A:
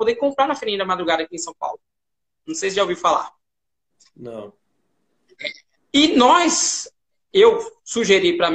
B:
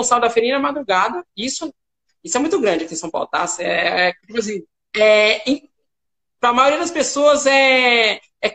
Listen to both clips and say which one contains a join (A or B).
A